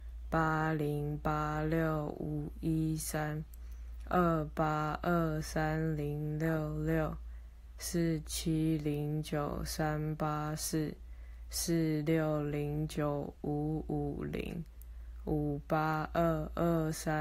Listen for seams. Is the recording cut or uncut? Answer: uncut